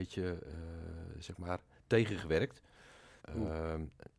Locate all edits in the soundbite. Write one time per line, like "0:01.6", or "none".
0:03.2